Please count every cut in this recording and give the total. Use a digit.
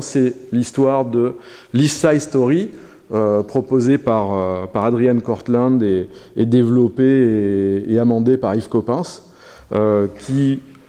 0